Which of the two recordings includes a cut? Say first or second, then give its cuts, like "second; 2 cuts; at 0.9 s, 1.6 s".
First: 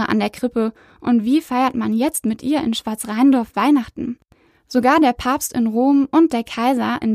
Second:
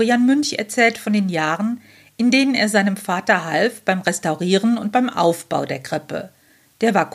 first; 1 cut; at 4.5 s